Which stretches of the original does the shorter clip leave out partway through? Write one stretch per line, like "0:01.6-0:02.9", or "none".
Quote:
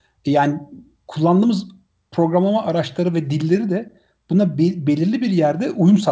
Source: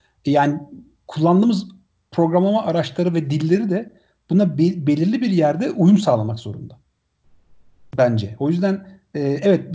none